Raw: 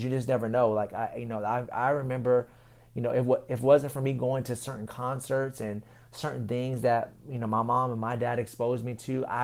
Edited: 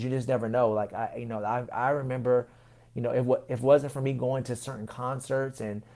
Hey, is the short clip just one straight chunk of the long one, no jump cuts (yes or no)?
yes